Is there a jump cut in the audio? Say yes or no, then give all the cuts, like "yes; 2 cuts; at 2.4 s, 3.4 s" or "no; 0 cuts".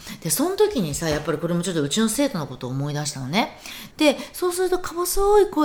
yes; 1 cut; at 3.9 s